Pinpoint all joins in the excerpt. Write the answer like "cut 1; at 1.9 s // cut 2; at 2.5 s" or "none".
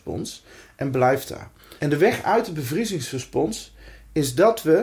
cut 1; at 1.8 s